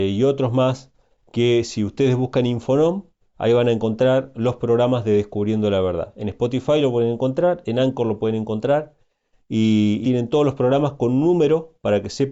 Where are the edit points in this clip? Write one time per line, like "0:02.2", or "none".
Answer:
0:10.0